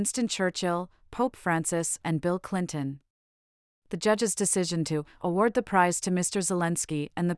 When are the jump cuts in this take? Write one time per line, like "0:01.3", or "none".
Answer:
0:02.0